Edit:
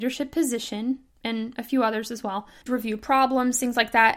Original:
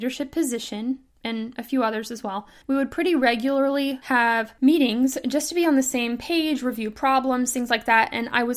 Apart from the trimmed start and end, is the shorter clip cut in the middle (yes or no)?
yes